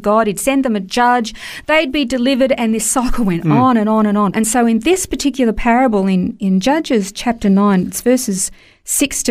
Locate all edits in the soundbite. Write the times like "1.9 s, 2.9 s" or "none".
4.3 s